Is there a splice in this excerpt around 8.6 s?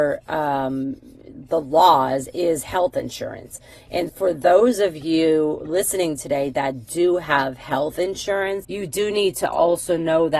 yes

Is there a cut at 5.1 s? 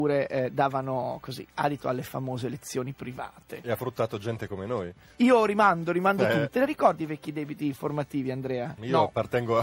yes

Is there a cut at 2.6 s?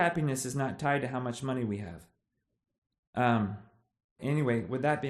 no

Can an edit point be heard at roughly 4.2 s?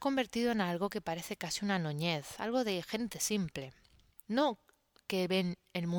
yes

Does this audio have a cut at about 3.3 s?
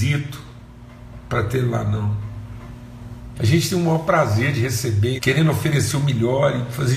yes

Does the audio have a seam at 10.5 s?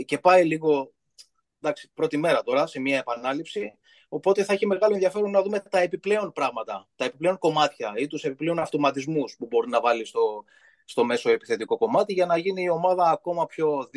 no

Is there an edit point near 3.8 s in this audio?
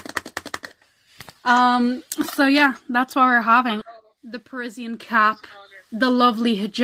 yes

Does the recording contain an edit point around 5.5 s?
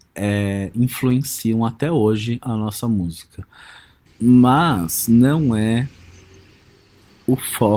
no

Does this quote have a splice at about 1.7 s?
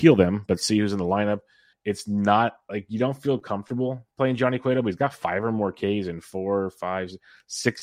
yes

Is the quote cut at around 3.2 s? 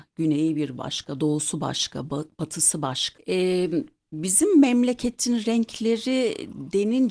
yes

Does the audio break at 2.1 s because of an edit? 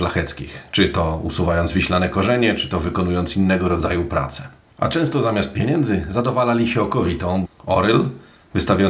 no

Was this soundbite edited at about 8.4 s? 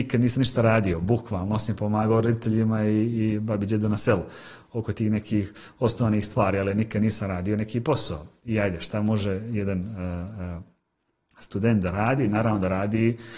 no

